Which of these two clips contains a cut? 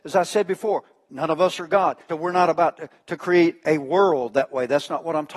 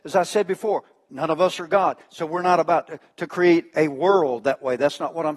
first; 1 cut; at 2.1 s

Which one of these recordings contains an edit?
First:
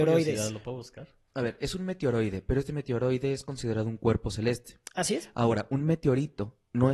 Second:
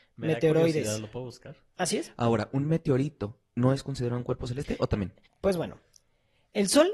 second; 2 cuts; at 1.7 s, 5.3 s

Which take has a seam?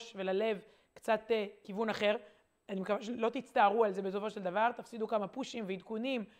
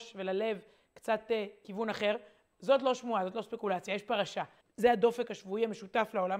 second; 2 cuts; at 2.5 s, 4.6 s

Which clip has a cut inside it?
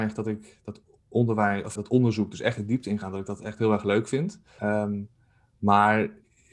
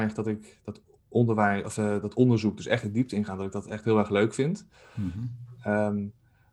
first; 2 cuts; at 1.8 s, 4.6 s

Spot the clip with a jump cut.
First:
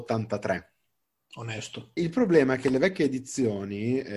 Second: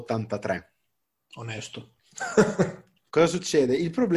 first; 1 cut; at 2.0 s

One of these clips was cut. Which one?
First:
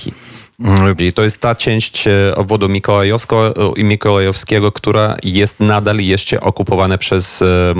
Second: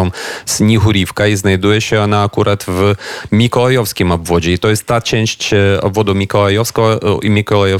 first; 1 cut; at 1.0 s

